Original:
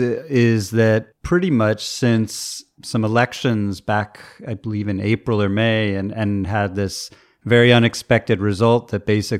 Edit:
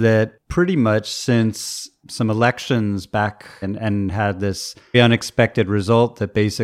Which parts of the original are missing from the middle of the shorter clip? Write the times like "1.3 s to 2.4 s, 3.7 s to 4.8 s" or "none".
4.4 s to 6.0 s, 7.3 s to 7.7 s